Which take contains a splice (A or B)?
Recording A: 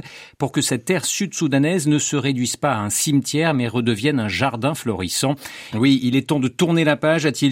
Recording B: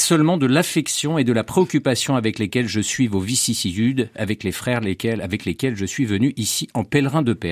A